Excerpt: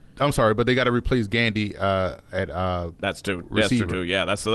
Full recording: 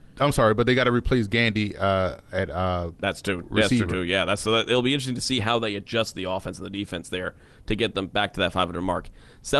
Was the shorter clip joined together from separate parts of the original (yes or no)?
no